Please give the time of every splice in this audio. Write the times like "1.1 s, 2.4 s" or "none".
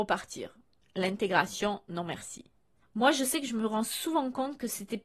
none